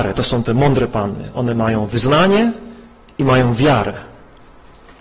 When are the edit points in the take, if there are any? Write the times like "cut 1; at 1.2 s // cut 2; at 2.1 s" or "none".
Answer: none